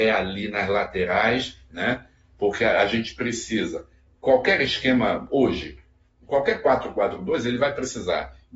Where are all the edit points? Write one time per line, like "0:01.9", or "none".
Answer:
none